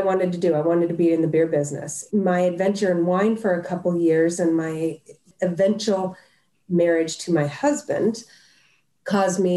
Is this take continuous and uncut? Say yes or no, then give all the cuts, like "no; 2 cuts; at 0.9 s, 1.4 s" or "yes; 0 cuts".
no; 1 cut; at 2.1 s